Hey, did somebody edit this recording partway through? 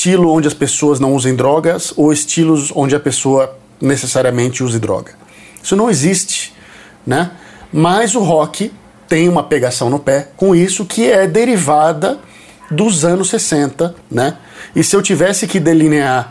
yes; 1 cut; at 14.0 s

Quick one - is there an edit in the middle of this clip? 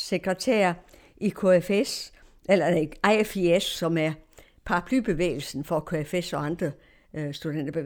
no; 0 cuts

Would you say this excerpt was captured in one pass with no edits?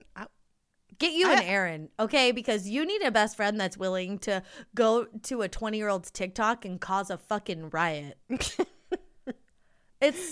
yes; 0 cuts

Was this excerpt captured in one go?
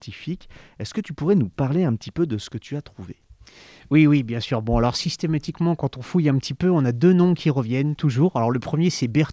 yes; 0 cuts

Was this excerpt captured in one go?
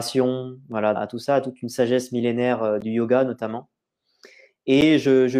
no; 1 cut; at 0.9 s

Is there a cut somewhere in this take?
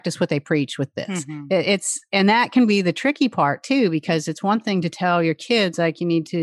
no; 0 cuts

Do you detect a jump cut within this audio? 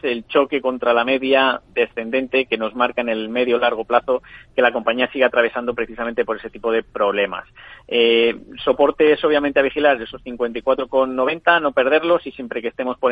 no; 0 cuts

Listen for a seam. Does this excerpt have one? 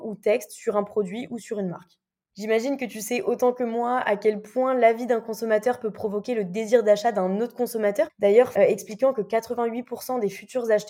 yes; 1 cut; at 8.6 s

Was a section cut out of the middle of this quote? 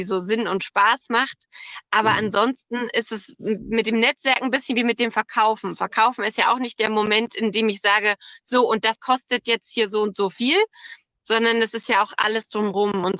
no; 0 cuts

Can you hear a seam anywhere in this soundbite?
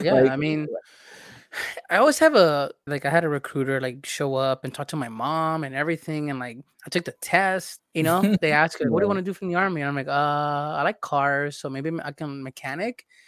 yes; 2 cuts; at 2.9 s, 7.8 s

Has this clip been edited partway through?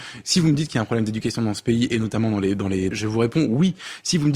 yes; 1 cut; at 2.9 s

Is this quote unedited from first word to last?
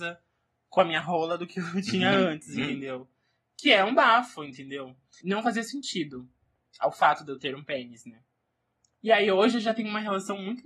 no; 1 cut; at 5.2 s

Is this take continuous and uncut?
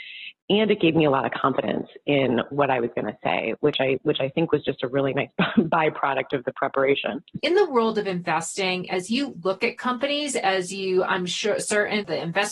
no; 1 cut; at 7.4 s

